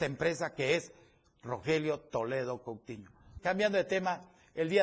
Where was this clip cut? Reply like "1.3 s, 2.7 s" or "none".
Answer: 3.4 s